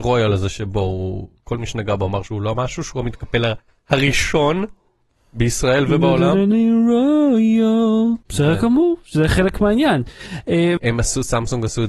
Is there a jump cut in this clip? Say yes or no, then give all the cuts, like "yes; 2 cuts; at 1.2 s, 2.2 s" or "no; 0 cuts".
yes; 2 cuts; at 8.2 s, 10.8 s